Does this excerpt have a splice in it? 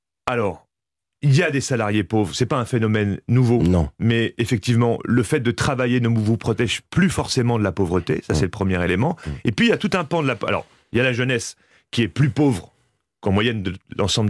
no; 0 cuts

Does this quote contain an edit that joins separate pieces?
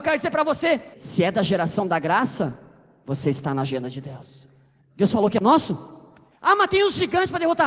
yes; 3 cuts; at 0.9 s, 4.8 s, 6.3 s

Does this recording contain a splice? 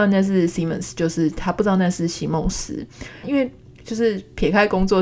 yes; 1 cut; at 3.2 s

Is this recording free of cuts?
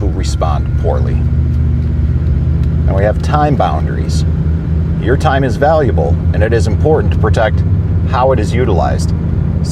yes; 0 cuts

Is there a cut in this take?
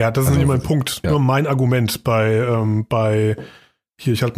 yes; 1 cut; at 1.0 s

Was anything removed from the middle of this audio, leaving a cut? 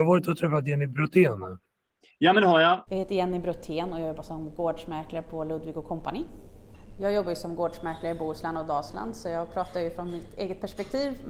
yes; 1 cut; at 2.9 s

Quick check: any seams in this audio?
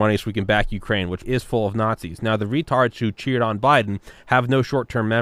yes; 1 cut; at 1.2 s

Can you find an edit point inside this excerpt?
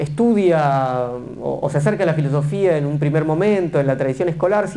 no; 0 cuts

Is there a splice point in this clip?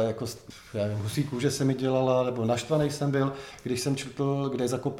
no; 0 cuts

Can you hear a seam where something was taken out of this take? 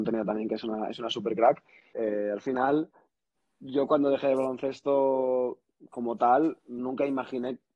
yes; 1 cut; at 1.9 s

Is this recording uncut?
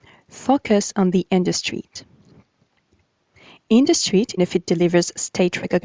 no; 1 cut; at 4.4 s

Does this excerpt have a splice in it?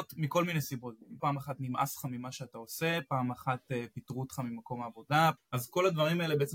yes; 2 cuts; at 1.2 s, 5.4 s

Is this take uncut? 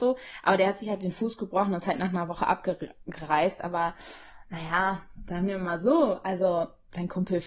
yes; 0 cuts

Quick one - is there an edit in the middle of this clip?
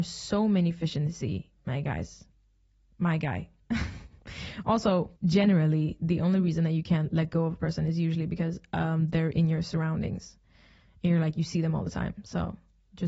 no; 0 cuts

